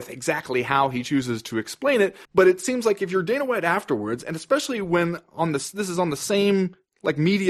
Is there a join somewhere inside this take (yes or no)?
yes